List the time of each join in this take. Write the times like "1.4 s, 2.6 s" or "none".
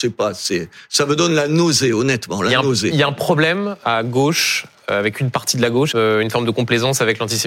3.8 s, 5.9 s

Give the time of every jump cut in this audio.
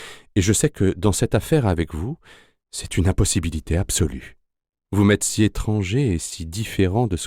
4.8 s

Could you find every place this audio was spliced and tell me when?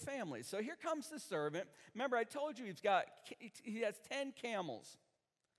none

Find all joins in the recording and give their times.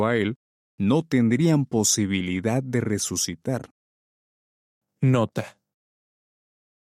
4.8 s

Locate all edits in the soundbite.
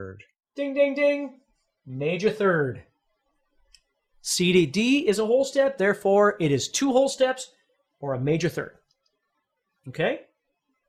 5.8 s

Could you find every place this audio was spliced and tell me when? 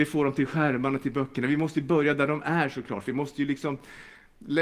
none

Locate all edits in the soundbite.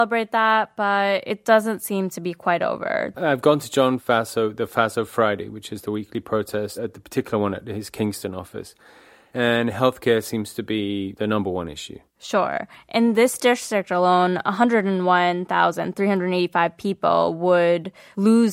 3.1 s

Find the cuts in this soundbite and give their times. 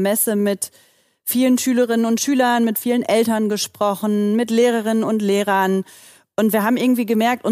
none

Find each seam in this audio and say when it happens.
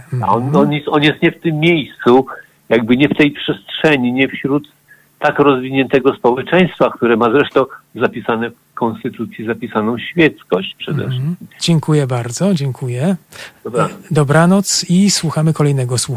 11.6 s, 13.6 s

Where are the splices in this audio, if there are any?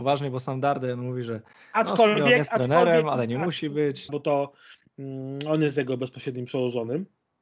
4.1 s

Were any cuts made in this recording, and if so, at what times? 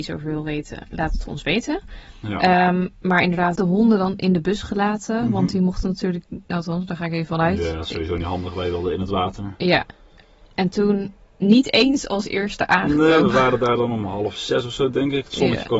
3.5 s

